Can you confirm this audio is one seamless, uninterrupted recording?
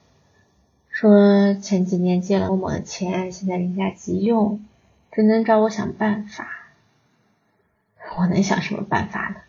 no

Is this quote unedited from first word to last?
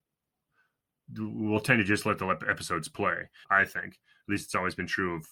no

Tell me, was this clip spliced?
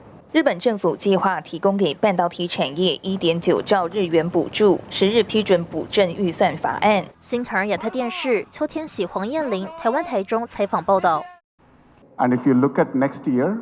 yes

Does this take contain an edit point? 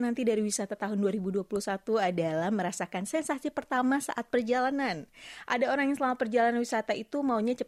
no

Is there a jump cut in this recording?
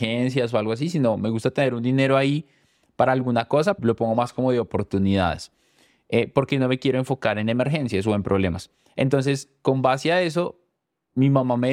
yes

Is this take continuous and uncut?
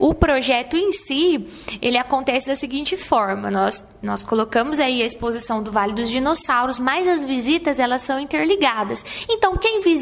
yes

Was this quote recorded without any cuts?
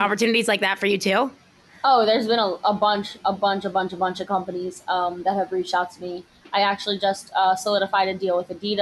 yes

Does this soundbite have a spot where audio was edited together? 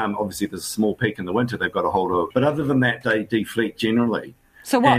yes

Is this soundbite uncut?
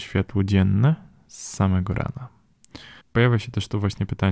no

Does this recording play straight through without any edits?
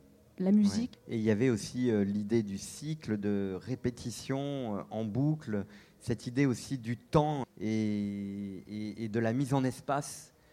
no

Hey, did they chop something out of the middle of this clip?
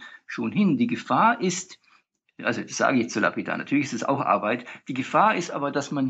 no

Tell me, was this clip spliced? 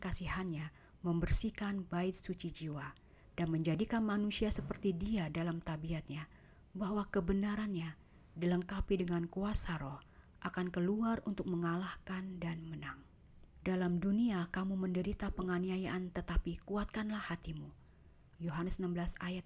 yes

